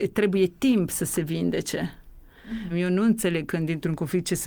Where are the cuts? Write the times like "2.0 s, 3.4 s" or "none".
2.7 s